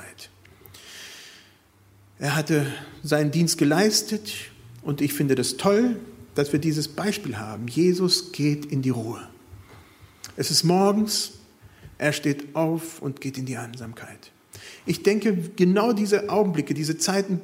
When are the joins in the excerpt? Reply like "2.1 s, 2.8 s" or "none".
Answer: none